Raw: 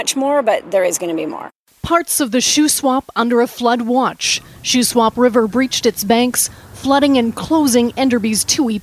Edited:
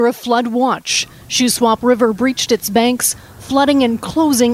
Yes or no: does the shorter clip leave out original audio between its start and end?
no